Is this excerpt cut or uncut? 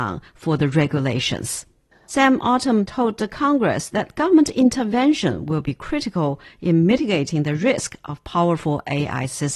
cut